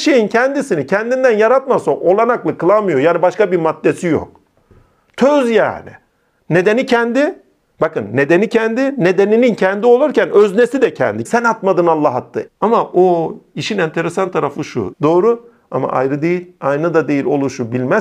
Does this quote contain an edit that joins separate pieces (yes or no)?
yes